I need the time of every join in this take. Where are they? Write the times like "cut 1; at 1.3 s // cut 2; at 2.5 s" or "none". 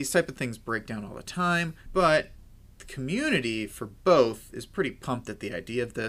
cut 1; at 1.9 s